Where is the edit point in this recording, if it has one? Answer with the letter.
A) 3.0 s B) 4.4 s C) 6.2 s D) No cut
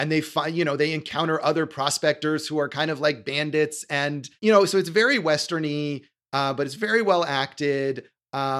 B